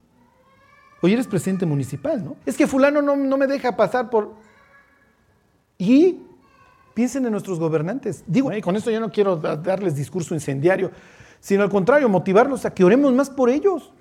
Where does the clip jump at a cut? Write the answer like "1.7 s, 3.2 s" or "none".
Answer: 2.4 s, 8.4 s